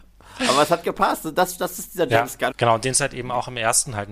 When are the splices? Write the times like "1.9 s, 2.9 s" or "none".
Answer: 2.5 s